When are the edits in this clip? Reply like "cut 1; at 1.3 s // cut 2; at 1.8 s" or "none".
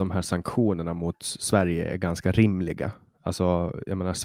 none